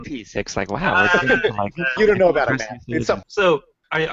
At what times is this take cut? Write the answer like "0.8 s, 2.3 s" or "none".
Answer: 2.0 s, 3.2 s